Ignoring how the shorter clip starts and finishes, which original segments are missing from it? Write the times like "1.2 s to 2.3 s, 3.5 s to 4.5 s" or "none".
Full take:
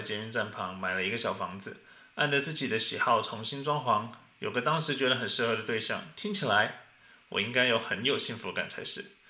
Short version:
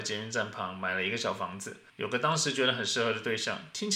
1.9 s to 4.3 s